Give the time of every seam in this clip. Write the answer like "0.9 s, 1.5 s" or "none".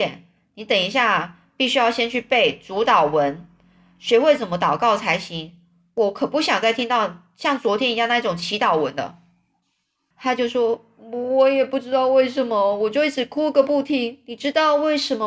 10.1 s